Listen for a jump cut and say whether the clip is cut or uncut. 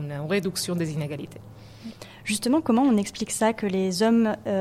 uncut